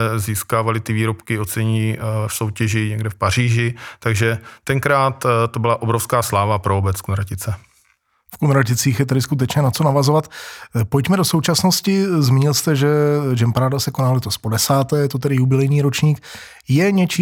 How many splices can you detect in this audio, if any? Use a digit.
0